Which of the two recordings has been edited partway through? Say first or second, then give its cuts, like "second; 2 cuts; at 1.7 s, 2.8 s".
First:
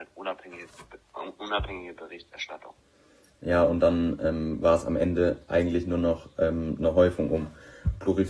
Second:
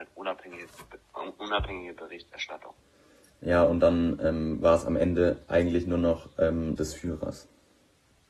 second; 1 cut; at 6.8 s